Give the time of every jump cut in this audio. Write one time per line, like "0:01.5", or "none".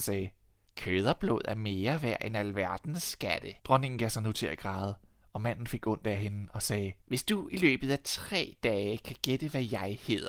0:03.6
0:07.0